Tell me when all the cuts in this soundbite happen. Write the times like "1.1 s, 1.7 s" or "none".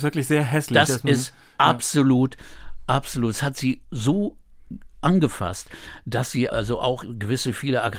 6.5 s